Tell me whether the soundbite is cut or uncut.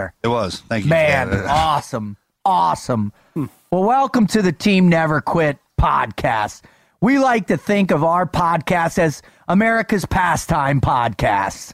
uncut